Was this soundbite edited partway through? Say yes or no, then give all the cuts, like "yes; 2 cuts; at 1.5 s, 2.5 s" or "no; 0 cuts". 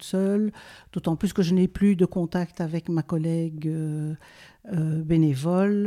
no; 0 cuts